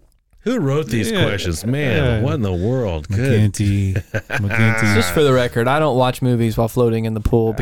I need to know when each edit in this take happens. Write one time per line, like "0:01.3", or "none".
none